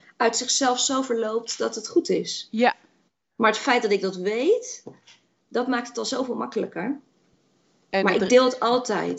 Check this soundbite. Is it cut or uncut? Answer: uncut